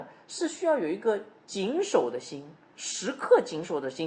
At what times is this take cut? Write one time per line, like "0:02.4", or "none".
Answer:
none